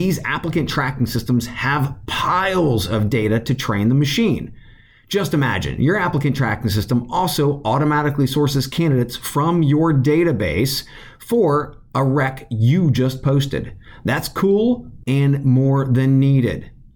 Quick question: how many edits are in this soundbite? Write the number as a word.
one